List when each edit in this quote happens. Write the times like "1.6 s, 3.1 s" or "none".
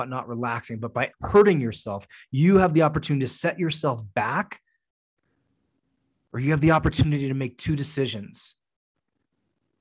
1.1 s